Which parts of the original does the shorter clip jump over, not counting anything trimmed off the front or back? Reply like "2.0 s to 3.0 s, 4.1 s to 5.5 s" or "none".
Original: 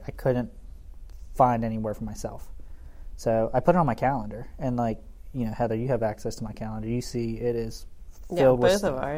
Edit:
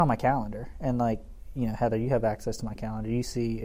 none